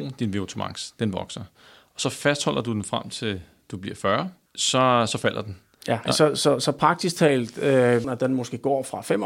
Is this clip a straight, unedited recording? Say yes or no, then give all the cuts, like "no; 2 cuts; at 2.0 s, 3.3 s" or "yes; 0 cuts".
no; 3 cuts; at 4.5 s, 6.1 s, 8.0 s